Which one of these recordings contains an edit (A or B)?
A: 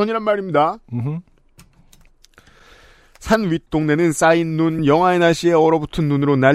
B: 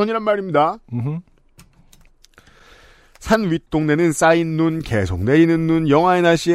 A